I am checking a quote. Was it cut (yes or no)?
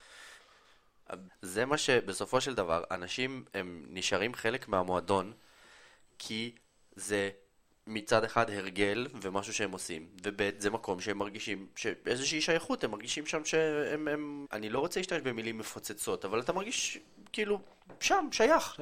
yes